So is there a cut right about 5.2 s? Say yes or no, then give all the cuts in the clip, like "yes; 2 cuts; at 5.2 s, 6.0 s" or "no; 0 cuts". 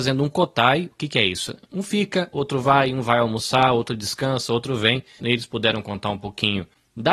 yes; 1 cut; at 5.2 s